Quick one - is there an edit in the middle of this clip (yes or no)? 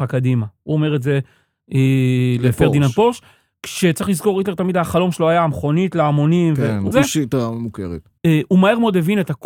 yes